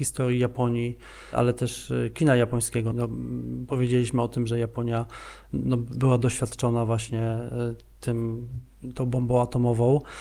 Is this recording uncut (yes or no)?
no